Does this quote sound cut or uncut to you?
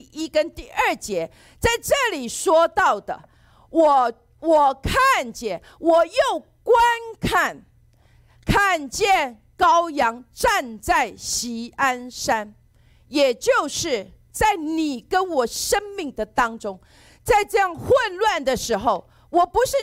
uncut